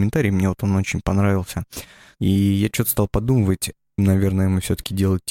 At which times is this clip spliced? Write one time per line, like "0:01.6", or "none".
0:02.2
0:04.0